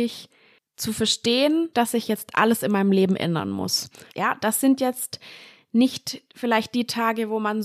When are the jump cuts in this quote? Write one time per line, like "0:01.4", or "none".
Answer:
0:01.7
0:04.1